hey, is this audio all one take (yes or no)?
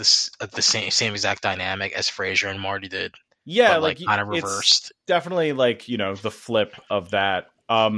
yes